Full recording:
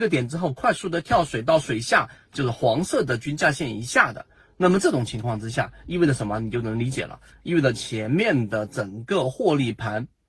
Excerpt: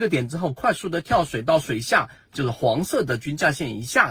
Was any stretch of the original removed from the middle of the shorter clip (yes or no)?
no